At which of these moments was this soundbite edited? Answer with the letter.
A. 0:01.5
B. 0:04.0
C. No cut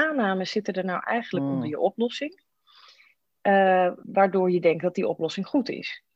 B